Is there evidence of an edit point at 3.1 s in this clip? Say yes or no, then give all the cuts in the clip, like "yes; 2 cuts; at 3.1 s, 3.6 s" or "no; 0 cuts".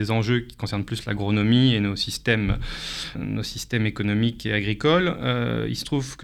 yes; 1 cut; at 3.1 s